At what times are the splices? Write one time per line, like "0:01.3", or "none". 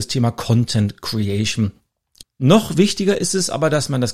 0:02.2